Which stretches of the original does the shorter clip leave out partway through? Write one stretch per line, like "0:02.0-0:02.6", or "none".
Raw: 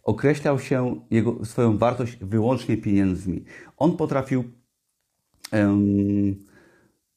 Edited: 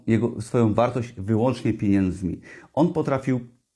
none